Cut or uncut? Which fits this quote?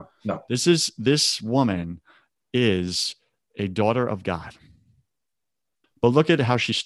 cut